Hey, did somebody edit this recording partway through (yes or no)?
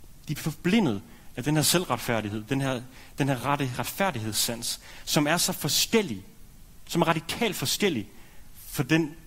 no